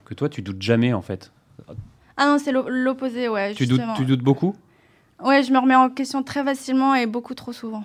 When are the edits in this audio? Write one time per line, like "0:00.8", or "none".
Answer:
none